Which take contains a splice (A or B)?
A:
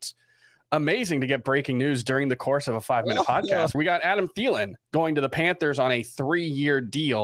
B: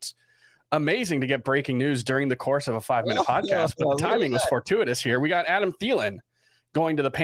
A